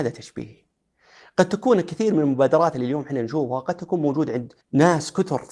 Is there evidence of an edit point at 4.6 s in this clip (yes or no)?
yes